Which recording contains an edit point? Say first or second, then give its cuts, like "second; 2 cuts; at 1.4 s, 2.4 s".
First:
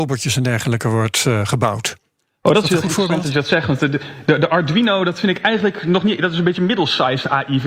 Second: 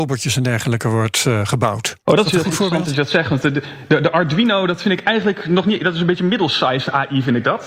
second; 1 cut; at 2.0 s